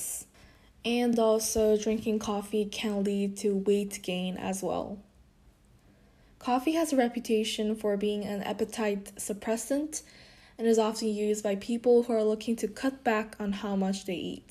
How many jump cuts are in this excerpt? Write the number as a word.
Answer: zero